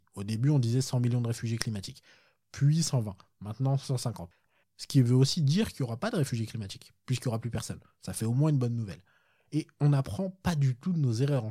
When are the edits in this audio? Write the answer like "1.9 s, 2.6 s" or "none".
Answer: 4.6 s